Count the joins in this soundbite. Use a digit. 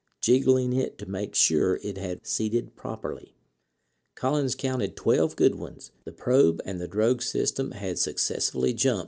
2